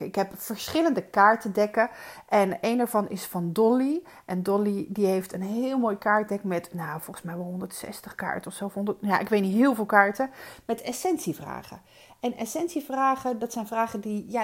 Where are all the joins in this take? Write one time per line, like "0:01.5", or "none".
none